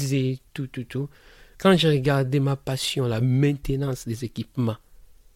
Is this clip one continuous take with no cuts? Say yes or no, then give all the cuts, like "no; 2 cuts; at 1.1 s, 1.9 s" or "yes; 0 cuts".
no; 1 cut; at 1.5 s